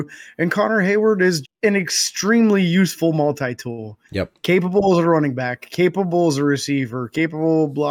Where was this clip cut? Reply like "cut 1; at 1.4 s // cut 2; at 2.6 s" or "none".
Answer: cut 1; at 1.4 s